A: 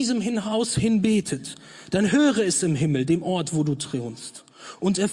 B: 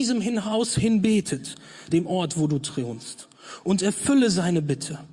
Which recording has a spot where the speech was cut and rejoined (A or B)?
B